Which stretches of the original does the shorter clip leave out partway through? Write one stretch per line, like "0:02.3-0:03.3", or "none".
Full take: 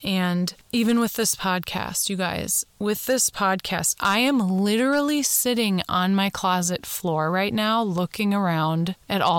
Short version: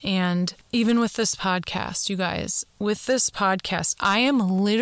none